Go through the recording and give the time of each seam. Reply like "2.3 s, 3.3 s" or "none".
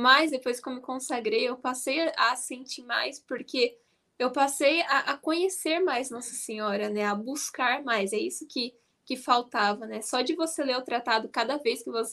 none